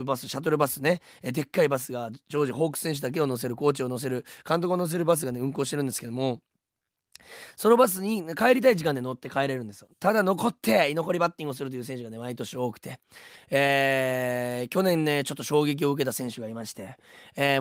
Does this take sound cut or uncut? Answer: uncut